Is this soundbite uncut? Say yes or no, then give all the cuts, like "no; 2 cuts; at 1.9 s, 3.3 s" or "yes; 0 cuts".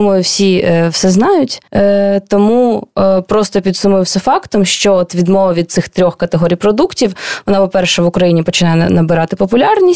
no; 1 cut; at 1.7 s